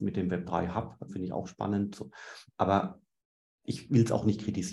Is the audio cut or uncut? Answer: cut